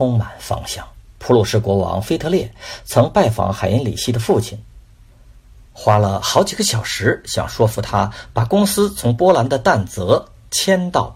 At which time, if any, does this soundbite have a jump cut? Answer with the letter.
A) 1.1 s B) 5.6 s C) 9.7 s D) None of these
A